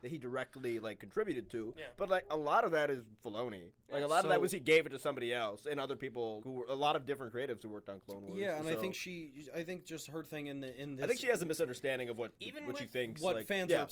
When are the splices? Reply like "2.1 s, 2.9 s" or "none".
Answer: 6.4 s, 12.3 s